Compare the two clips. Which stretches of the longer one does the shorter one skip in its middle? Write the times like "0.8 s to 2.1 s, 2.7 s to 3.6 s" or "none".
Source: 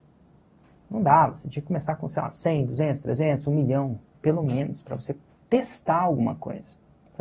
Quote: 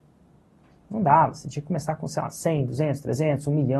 none